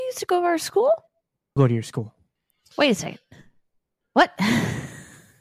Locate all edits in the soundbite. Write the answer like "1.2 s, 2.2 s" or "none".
1.6 s